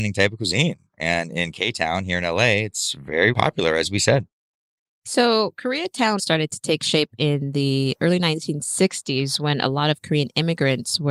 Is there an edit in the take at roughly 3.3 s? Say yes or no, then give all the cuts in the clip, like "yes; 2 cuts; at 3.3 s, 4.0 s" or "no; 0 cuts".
yes; 2 cuts; at 3.3 s, 6.2 s